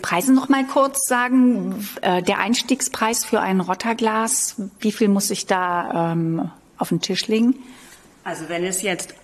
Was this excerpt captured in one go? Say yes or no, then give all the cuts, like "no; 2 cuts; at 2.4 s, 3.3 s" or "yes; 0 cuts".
yes; 0 cuts